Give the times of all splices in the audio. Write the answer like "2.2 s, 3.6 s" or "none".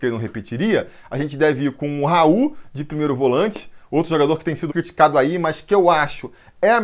4.7 s

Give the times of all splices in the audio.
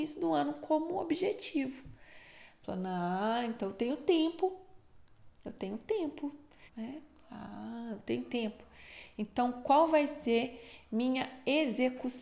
6.7 s

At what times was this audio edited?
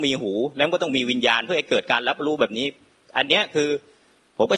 none

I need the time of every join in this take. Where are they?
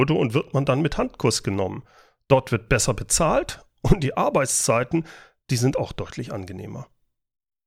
none

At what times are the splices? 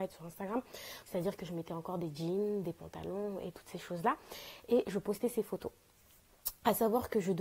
1.0 s

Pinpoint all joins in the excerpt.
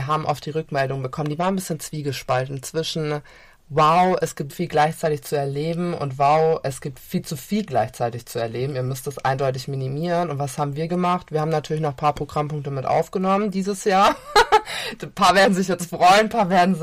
4.5 s

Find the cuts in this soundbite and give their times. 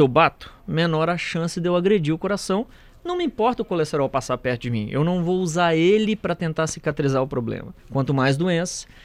7.8 s

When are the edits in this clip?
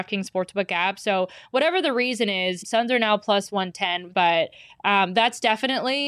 2.6 s, 4.1 s

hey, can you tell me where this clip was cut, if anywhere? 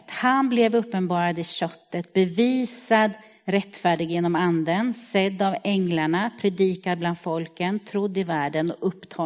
none

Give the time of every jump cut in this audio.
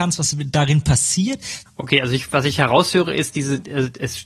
1.7 s

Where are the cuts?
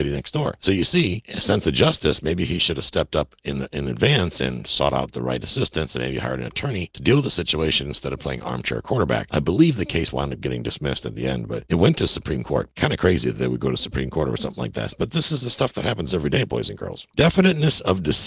none

